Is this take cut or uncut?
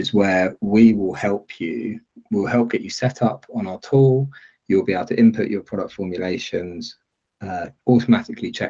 uncut